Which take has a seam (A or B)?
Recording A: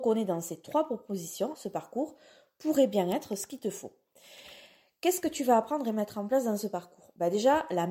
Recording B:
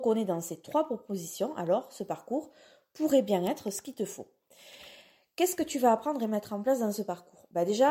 A